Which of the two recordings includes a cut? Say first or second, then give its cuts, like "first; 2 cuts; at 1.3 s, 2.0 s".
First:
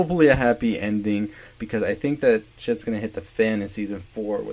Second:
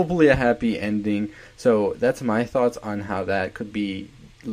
first; 1 cut; at 1.6 s